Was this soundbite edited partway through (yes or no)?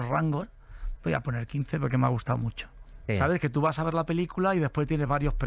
yes